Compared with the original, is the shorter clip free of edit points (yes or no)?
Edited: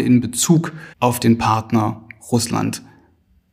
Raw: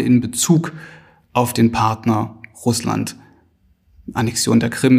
no